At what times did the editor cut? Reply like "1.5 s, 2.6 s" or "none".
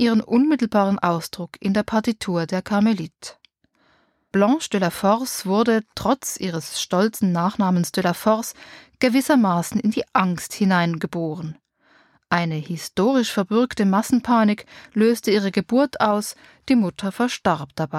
none